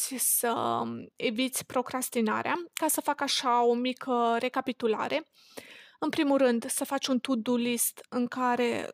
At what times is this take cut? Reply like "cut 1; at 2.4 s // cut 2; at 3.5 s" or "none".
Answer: none